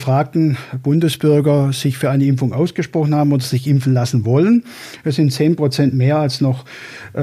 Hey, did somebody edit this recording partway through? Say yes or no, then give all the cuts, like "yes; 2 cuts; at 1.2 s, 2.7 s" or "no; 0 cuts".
no; 0 cuts